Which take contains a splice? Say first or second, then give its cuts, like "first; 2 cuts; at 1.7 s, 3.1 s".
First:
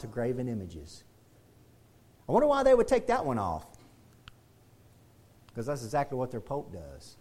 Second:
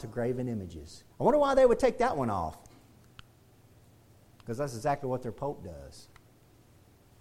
second; 1 cut; at 1.1 s